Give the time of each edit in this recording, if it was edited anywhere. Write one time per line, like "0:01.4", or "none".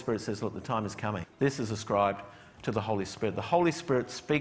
0:01.2